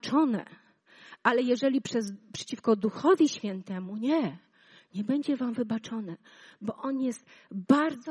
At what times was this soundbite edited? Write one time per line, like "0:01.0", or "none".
none